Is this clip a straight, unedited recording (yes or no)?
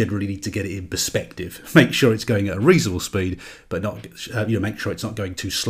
yes